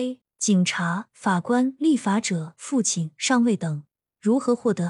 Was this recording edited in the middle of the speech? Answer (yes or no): no